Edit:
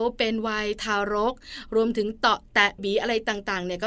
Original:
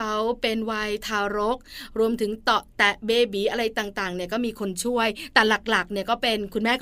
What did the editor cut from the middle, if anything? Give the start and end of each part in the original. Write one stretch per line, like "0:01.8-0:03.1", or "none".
0:03.0-0:03.3